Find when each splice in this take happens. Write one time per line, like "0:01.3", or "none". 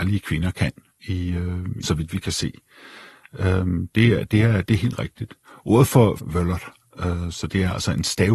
0:01.8
0:06.2